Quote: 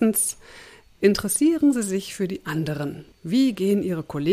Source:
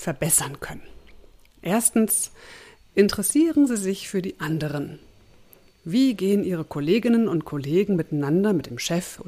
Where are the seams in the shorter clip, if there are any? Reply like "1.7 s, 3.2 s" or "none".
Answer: 3.1 s